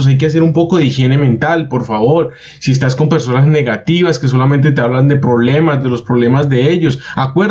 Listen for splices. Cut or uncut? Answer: uncut